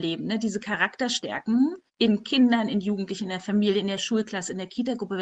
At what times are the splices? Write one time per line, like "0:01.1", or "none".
0:01.9